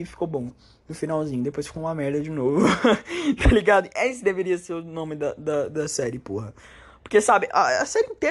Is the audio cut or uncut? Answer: uncut